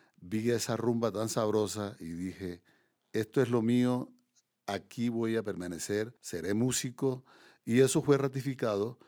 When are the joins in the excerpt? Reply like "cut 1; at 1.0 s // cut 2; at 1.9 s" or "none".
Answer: cut 1; at 6.2 s